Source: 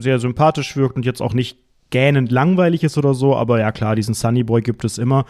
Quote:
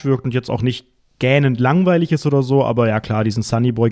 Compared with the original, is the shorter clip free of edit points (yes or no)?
yes